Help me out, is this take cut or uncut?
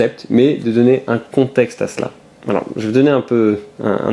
uncut